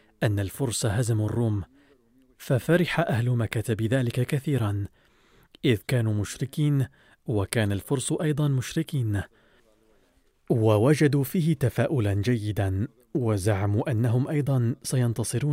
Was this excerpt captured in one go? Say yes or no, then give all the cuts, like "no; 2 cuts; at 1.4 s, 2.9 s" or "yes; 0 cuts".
yes; 0 cuts